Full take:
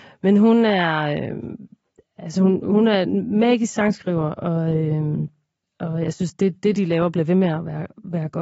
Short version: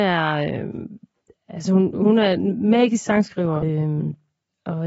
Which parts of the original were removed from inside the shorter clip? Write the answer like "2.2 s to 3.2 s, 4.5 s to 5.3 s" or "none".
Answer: 4.3 s to 4.8 s